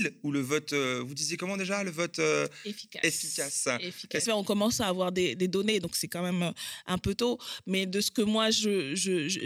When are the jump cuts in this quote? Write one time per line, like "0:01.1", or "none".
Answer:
0:04.3